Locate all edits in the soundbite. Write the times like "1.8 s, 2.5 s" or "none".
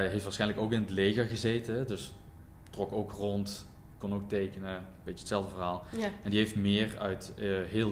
none